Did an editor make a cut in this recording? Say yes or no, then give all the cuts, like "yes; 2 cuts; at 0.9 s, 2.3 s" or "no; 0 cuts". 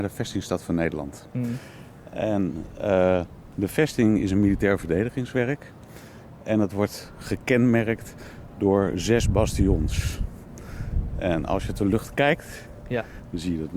no; 0 cuts